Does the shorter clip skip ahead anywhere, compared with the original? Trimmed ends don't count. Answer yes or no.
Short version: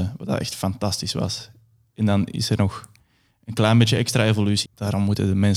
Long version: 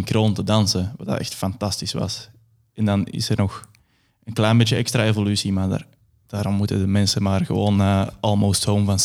yes